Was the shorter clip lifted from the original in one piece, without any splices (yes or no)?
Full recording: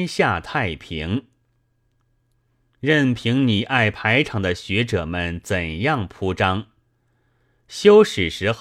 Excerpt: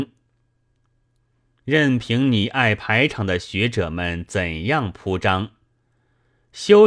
yes